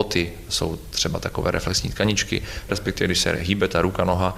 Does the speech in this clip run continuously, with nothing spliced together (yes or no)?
no